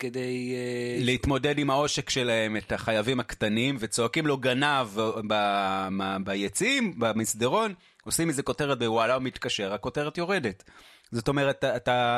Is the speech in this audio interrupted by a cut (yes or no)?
no